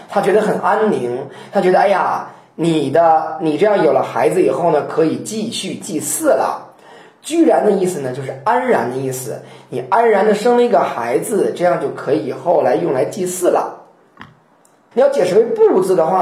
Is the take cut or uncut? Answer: cut